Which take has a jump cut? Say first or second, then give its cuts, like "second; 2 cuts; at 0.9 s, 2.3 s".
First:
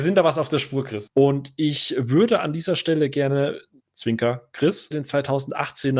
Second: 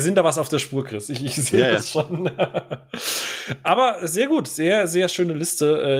first; 3 cuts; at 1.1 s, 3.8 s, 4.9 s